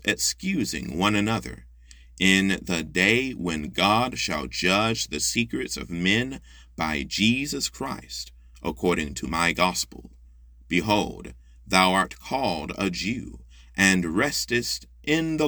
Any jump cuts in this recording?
no; 0 cuts

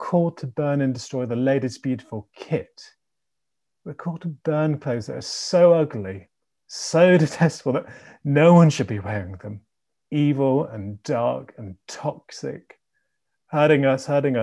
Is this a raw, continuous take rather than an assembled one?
yes; 0 cuts

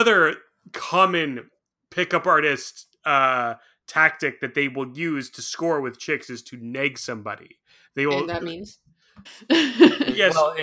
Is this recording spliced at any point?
yes; 1 cut; at 9.3 s

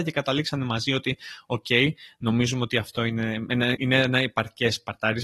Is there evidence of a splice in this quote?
yes; 1 cut; at 3.7 s

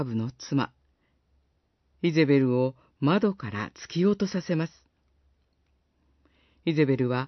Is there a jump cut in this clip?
no; 0 cuts

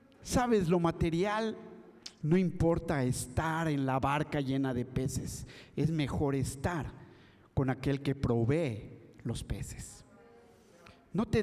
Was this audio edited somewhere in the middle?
yes; 1 cut; at 2.2 s

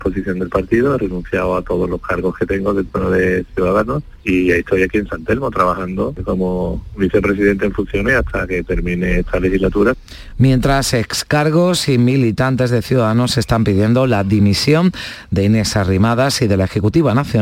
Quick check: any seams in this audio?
no; 0 cuts

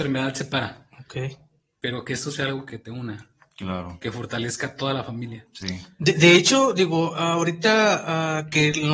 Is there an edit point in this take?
no; 0 cuts

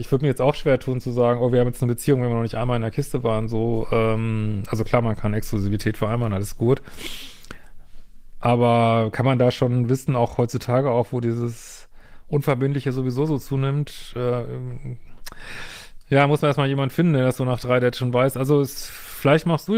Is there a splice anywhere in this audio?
no; 0 cuts

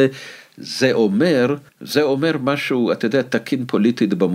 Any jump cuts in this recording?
yes; 1 cut; at 1.7 s

